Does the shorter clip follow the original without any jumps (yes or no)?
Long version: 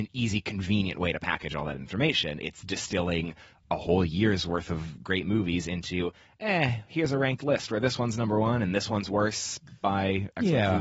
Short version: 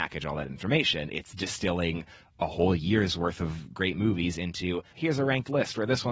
no